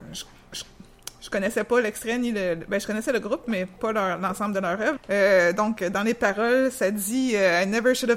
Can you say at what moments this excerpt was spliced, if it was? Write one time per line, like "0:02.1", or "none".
0:05.0